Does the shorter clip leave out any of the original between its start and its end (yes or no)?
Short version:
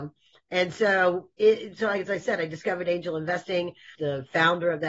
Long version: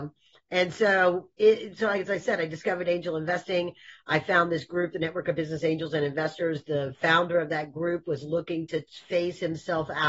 yes